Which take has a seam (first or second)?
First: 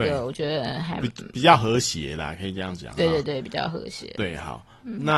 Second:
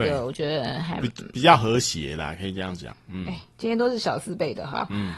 second